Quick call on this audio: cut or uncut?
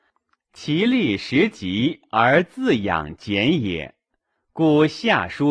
uncut